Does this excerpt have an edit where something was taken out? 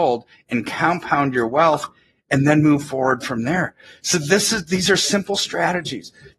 no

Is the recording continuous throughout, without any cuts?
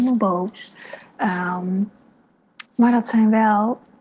no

